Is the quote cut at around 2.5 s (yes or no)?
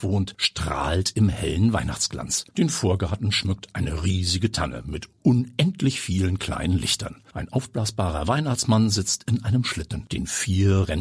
no